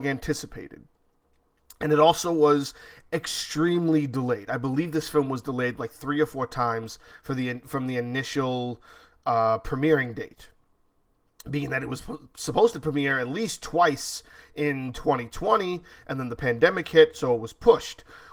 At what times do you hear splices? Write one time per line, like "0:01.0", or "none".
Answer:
none